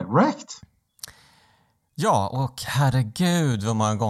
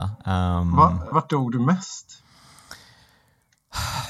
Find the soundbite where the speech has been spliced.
second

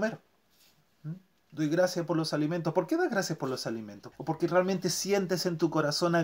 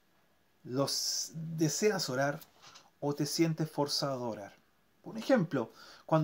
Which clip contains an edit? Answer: first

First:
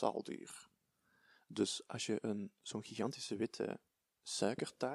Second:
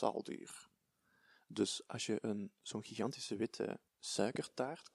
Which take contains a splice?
second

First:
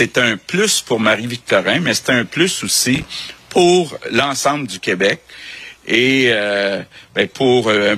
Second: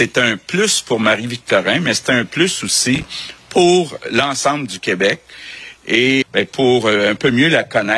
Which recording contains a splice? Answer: second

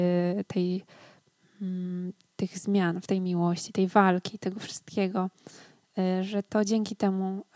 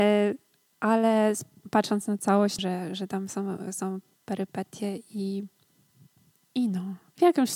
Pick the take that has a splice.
second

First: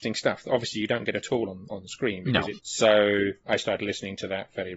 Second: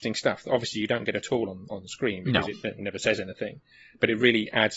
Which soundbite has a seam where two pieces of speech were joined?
first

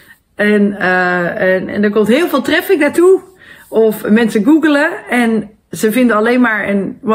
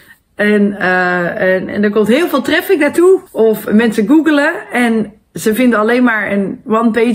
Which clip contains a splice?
second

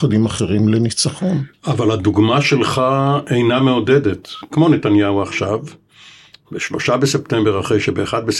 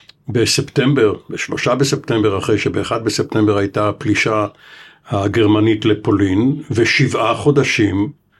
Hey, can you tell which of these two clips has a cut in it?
first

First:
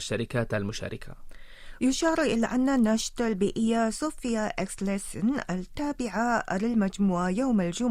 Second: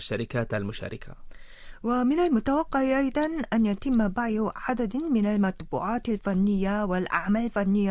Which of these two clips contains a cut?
first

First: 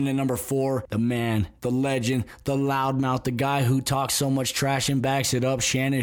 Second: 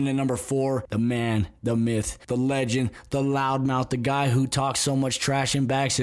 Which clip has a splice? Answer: first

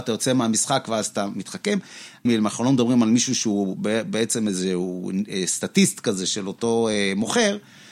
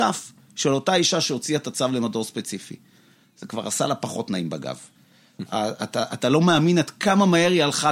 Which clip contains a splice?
first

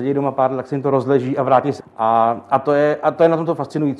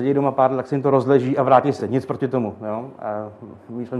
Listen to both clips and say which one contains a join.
first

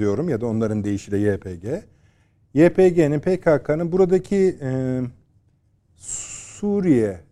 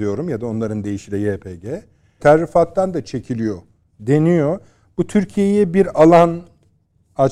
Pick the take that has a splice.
second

